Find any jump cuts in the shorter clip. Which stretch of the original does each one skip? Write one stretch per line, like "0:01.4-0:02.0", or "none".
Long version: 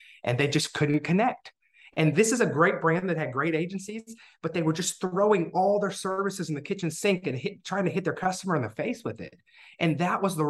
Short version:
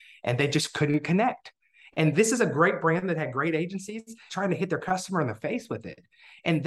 0:04.3-0:07.6